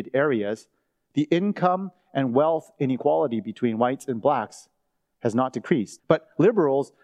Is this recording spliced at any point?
yes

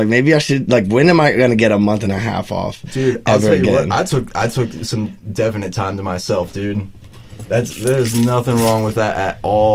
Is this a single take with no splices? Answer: yes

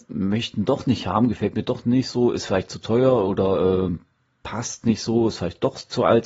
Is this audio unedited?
yes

